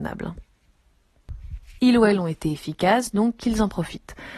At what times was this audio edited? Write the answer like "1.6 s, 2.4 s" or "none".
1.8 s